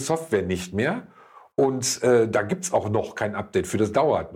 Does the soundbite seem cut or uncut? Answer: uncut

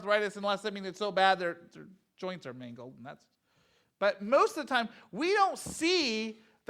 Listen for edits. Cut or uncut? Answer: uncut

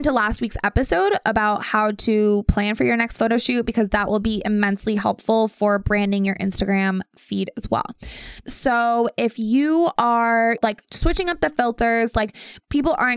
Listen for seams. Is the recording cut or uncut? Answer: cut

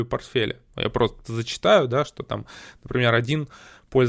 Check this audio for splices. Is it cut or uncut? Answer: cut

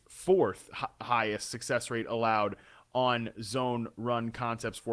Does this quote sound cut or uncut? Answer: uncut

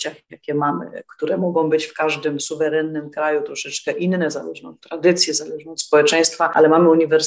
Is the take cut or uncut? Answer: uncut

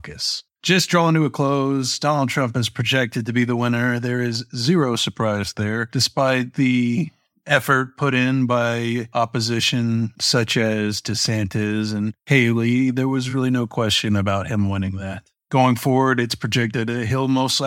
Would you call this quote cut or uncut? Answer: uncut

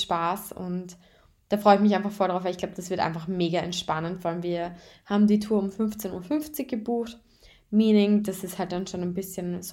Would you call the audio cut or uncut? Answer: uncut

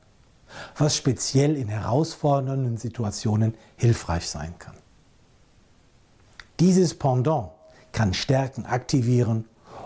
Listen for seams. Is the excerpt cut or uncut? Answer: cut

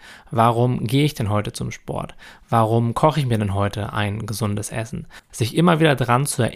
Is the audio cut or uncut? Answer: cut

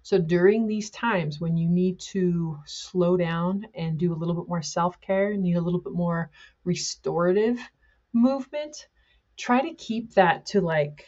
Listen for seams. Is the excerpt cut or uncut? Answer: uncut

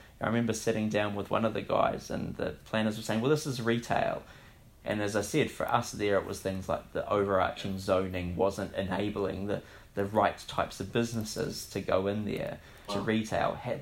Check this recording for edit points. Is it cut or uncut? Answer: cut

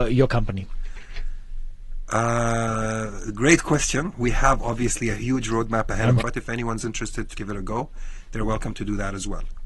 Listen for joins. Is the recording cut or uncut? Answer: cut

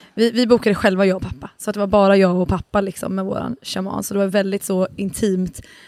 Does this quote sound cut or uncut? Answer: uncut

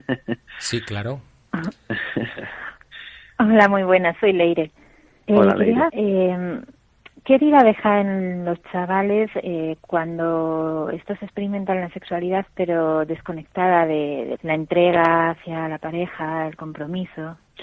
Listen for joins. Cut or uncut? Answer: cut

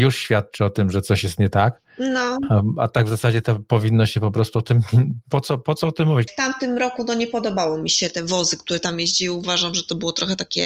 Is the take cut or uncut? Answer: cut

